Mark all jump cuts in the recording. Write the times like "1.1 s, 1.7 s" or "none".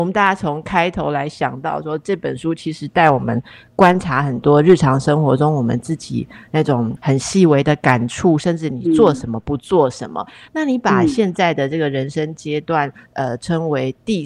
none